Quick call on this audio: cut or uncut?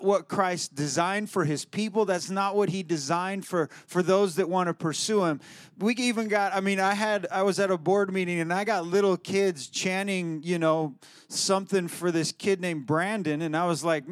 uncut